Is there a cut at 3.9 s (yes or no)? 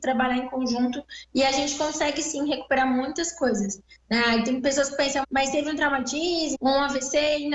no